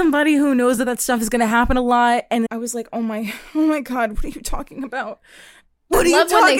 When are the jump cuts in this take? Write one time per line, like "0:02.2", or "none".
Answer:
0:02.5